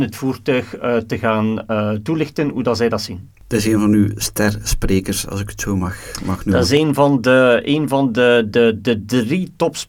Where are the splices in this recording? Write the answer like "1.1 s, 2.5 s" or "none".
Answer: none